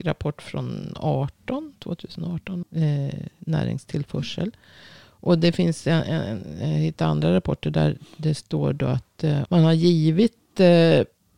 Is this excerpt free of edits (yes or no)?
no